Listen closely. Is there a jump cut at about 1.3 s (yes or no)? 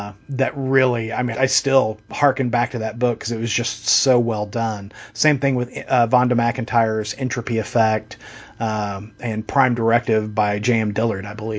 yes